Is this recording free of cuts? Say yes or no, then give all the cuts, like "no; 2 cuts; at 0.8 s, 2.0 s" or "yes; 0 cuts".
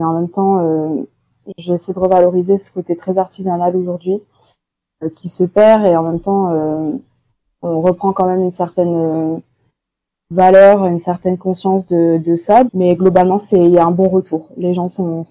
no; 2 cuts; at 5.1 s, 12.7 s